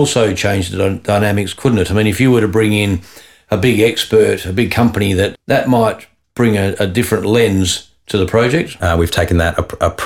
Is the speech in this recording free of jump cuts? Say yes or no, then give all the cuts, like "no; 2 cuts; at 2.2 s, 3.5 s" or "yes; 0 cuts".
no; 2 cuts; at 5.3 s, 8.8 s